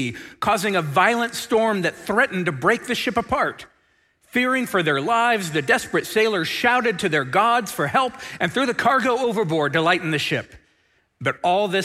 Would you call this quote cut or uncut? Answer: uncut